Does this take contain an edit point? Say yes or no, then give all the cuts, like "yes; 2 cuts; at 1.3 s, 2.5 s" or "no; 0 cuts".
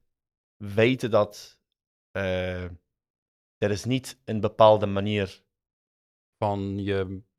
yes; 1 cut; at 6.3 s